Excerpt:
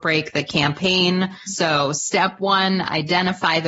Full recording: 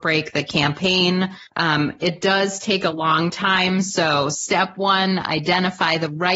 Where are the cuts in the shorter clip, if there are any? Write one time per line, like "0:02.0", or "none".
0:01.5